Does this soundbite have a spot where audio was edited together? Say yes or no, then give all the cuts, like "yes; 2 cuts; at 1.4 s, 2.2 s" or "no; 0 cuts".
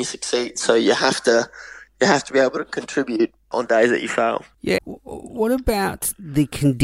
yes; 2 cuts; at 3.5 s, 4.8 s